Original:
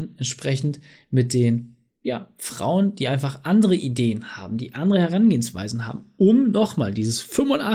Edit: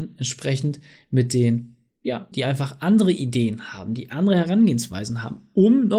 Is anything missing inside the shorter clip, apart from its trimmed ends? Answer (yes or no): yes